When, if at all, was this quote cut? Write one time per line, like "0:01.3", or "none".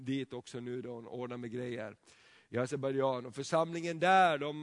none

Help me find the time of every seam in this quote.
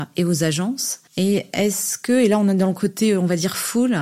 0:01.1

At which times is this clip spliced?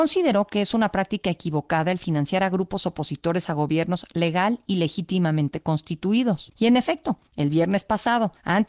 0:06.5

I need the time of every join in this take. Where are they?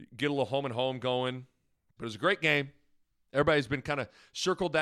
0:02.0

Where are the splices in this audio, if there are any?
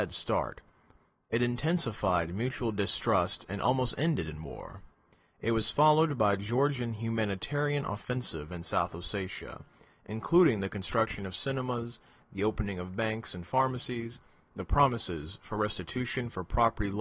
none

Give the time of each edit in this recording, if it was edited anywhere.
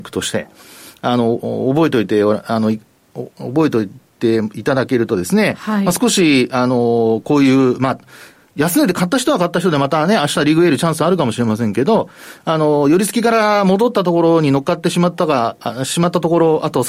none

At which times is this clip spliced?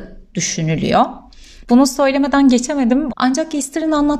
0:01.6
0:03.1

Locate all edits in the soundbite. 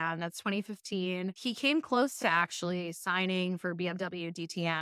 none

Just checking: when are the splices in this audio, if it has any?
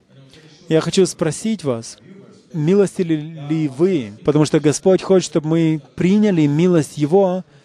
0:02.5
0:04.2

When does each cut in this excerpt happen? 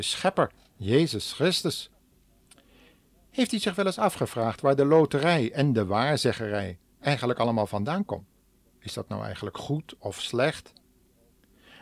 0:08.7

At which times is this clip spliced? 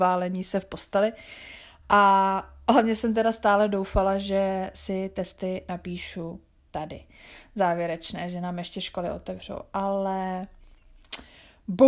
0:01.8

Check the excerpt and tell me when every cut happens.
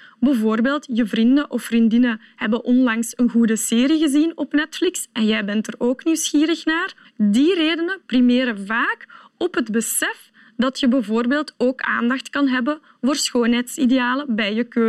0:07.0

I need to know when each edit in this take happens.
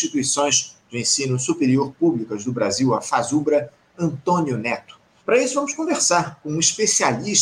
0:05.2

